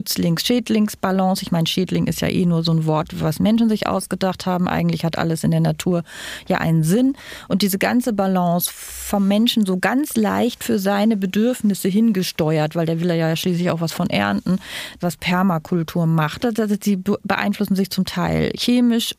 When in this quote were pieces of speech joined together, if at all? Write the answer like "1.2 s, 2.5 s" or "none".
15.0 s, 16.4 s